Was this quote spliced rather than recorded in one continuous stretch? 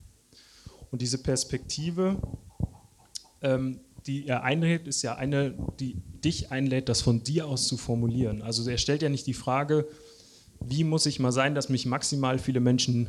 no; 0 cuts

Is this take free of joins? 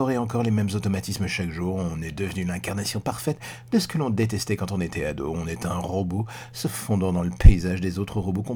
yes; 0 cuts

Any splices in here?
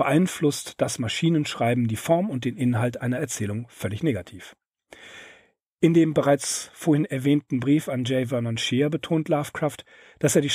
no; 0 cuts

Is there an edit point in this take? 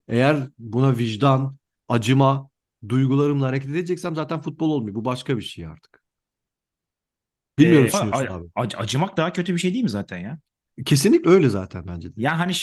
yes; 2 cuts; at 7.9 s, 11.2 s

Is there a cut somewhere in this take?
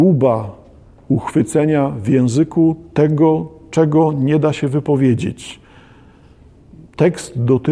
no; 0 cuts

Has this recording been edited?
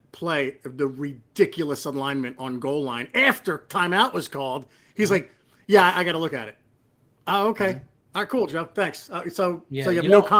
no; 0 cuts

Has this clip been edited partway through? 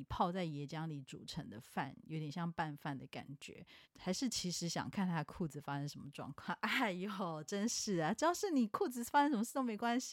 yes; 1 cut; at 3.8 s

